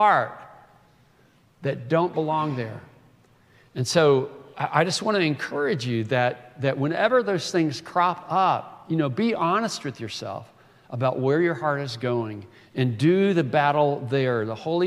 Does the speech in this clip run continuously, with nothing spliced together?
yes; 0 cuts

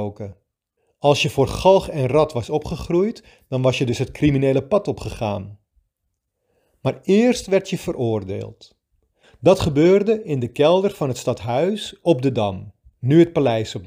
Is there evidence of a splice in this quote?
no; 0 cuts

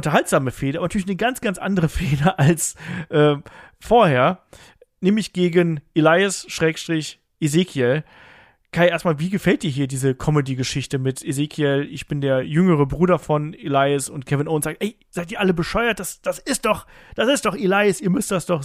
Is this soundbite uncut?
yes; 0 cuts

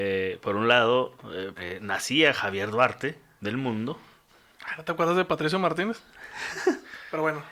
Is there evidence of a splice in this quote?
yes; 2 cuts; at 1.5 s, 3.4 s

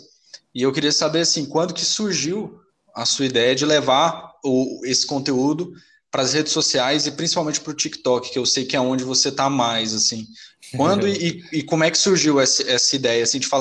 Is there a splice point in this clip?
no; 0 cuts

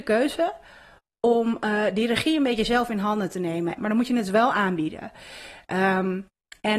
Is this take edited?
yes; 1 cut; at 3.8 s

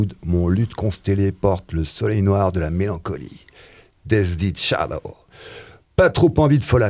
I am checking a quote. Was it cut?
no; 0 cuts

